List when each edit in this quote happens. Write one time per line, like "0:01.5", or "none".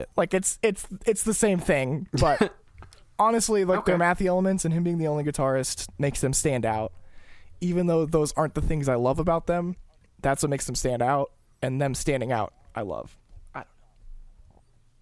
none